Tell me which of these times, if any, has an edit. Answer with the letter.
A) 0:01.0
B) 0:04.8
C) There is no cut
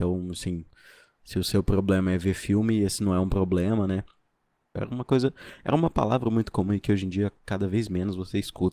B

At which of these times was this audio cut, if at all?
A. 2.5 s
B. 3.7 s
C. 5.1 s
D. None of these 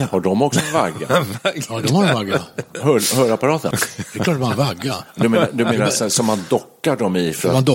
B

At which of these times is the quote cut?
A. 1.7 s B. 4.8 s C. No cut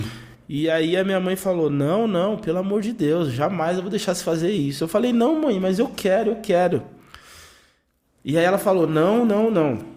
C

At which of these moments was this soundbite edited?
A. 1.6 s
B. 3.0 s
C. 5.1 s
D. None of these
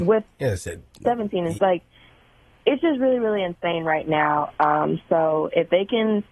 A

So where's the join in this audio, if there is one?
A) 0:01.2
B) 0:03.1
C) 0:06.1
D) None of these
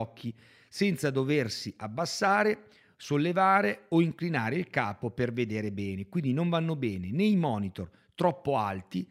D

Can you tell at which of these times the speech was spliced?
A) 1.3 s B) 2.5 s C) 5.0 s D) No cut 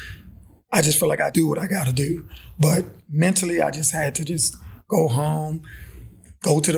A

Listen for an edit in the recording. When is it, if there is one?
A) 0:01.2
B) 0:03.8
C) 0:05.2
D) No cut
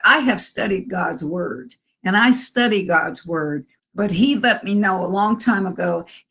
B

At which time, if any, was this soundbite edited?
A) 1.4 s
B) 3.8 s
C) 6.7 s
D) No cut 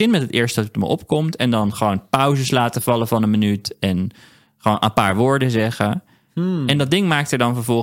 D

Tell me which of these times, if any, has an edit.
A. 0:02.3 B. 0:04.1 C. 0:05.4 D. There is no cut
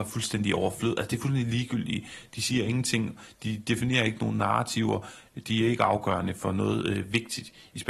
D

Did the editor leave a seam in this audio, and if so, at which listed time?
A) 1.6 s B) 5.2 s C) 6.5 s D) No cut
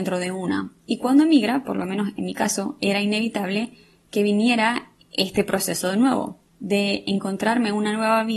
C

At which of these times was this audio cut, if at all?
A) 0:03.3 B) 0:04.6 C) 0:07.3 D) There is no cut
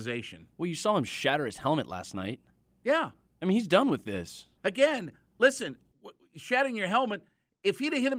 B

